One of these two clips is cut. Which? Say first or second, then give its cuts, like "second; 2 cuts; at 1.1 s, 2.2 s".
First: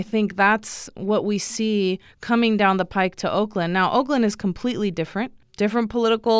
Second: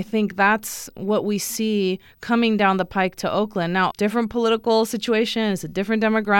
second; 1 cut; at 3.9 s